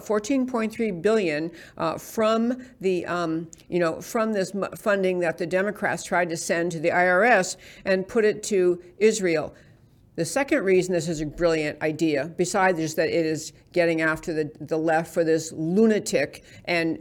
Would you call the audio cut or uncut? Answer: uncut